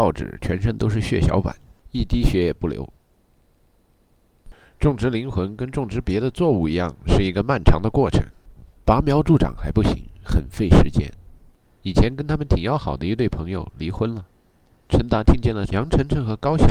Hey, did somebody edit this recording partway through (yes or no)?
yes